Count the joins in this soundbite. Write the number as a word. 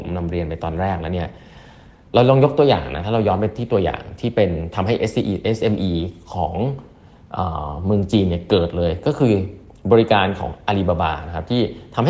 zero